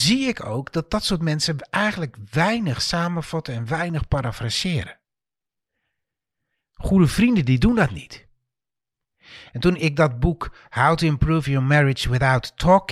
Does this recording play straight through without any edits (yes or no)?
no